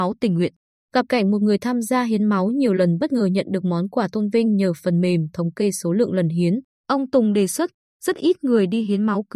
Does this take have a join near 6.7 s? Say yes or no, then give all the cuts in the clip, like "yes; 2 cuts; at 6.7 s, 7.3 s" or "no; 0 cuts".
yes; 1 cut; at 6.7 s